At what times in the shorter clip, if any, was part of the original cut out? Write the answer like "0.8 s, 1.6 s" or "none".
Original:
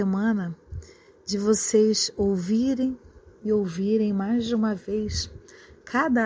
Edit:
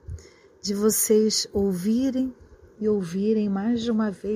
none